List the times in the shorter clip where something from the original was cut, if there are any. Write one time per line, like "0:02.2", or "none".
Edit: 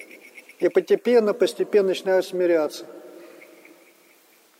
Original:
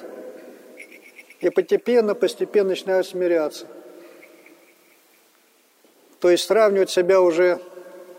none